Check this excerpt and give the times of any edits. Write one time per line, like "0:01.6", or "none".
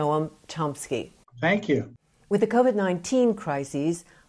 0:01.2